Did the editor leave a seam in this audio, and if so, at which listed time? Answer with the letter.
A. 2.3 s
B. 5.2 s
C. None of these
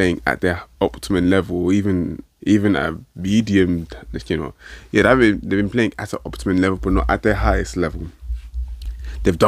A